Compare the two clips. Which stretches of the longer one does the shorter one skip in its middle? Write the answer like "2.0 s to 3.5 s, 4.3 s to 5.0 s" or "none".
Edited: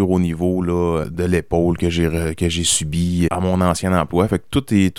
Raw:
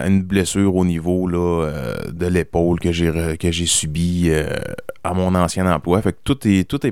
1.7 s to 2.0 s, 4.3 s to 5.0 s